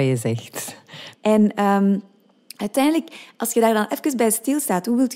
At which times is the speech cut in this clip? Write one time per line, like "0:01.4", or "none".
0:01.1